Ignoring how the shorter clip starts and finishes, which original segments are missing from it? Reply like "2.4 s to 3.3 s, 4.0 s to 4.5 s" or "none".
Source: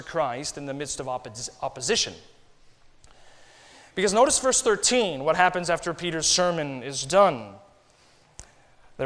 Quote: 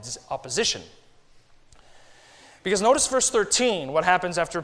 none